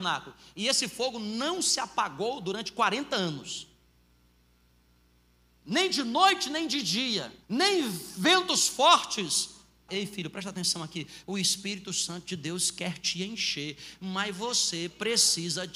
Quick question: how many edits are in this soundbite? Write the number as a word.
two